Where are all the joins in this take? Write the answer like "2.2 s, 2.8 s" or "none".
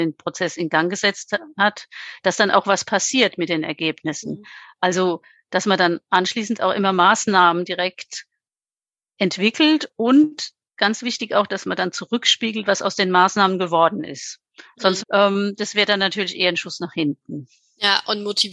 15.0 s